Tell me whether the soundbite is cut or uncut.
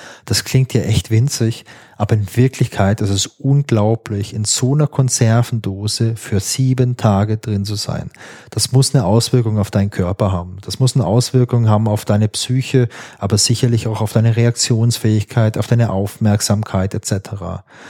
uncut